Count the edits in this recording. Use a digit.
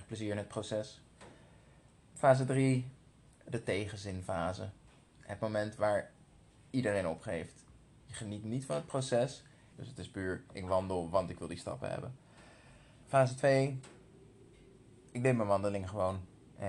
2